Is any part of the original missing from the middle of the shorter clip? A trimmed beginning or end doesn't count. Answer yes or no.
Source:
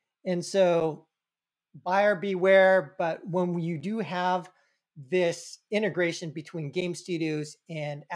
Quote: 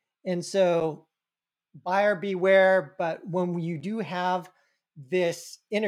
no